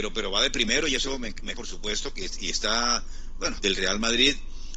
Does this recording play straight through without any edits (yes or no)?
no